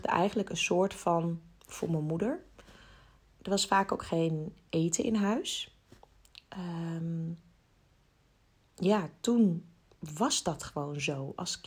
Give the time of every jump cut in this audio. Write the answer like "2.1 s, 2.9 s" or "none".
none